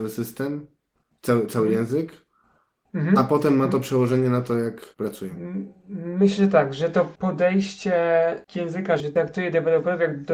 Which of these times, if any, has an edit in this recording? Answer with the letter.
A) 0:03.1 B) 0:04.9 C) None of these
B